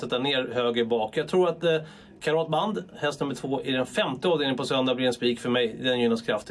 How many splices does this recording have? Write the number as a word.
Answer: zero